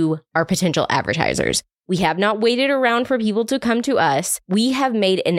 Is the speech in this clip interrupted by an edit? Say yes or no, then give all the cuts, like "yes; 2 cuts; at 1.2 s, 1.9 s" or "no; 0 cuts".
no; 0 cuts